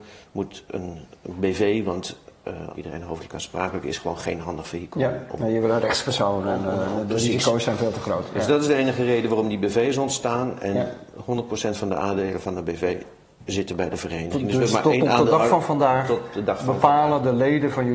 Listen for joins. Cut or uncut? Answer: cut